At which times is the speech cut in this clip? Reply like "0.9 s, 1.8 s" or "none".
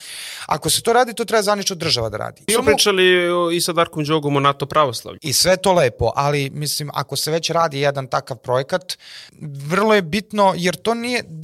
2.5 s, 5.2 s, 9.3 s